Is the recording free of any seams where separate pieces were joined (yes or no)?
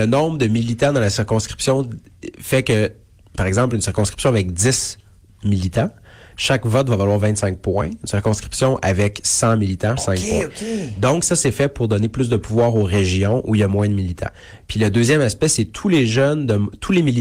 no